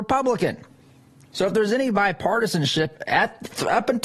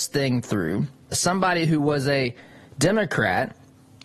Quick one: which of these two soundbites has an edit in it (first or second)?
second